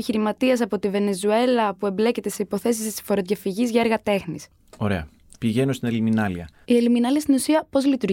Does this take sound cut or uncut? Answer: cut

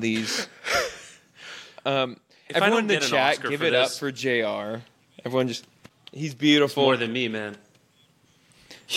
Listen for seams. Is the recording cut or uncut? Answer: uncut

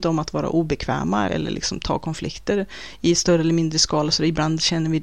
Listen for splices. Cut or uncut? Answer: cut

